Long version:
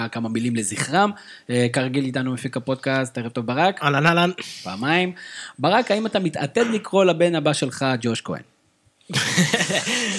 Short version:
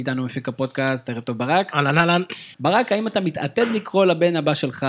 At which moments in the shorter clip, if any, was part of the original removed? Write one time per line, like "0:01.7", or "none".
0:02.5